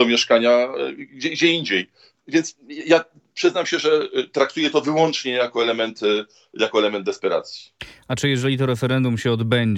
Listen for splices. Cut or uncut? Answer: uncut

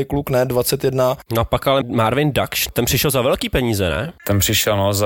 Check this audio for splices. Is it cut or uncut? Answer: cut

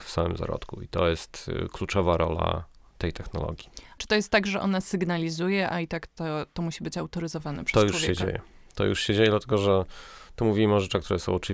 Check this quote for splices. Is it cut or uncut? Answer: cut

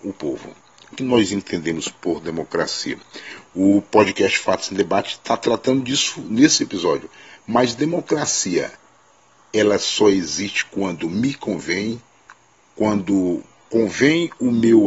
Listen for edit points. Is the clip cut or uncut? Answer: cut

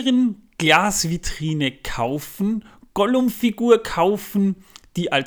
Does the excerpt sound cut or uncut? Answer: uncut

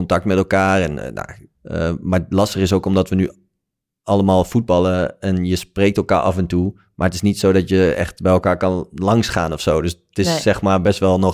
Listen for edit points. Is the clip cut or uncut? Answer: cut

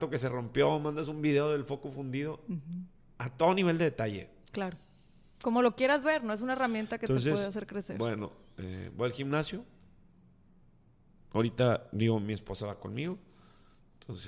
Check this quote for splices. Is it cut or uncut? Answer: uncut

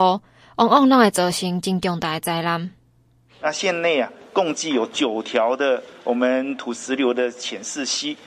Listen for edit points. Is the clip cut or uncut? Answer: cut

